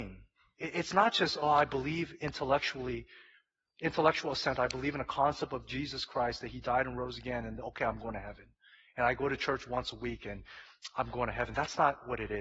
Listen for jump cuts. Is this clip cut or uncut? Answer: uncut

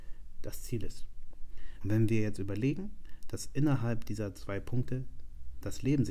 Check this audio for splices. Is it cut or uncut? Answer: cut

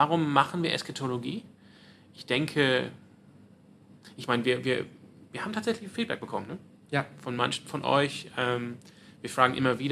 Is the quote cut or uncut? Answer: uncut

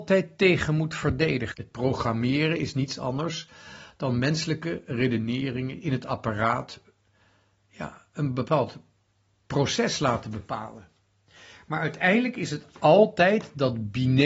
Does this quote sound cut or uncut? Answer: cut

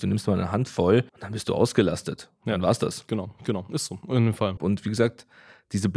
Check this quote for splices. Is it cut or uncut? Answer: cut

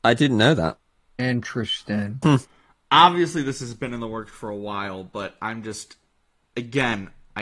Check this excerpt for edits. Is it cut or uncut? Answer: cut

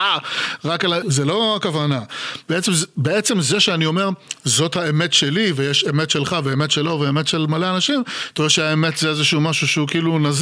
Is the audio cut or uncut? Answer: cut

